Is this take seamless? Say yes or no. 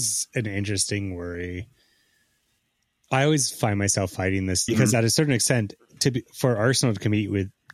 no